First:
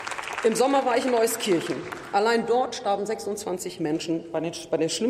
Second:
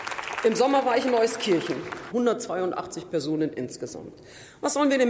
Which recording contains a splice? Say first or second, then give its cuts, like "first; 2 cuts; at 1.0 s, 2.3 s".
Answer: second; 1 cut; at 2.1 s